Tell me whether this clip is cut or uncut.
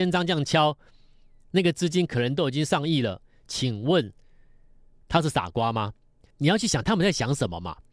cut